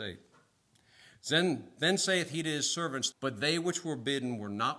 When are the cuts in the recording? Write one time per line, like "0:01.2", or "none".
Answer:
0:03.1

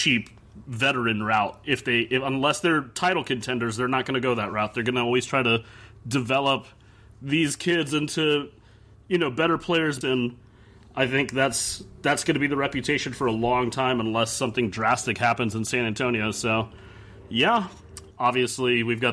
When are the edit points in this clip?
0:10.0
0:18.1

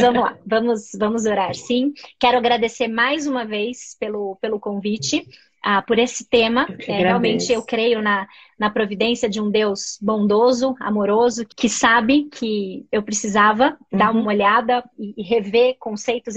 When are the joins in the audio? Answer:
none

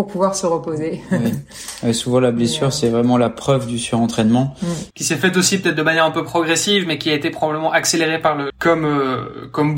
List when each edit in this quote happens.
0:04.9
0:08.5

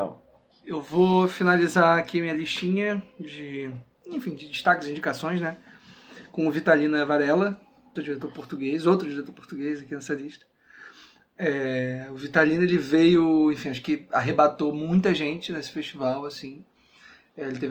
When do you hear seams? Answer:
0:08.0

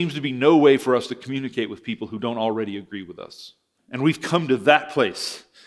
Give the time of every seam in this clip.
0:03.8

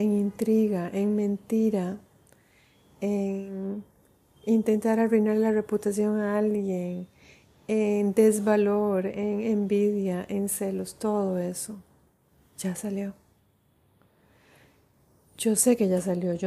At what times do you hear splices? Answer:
none

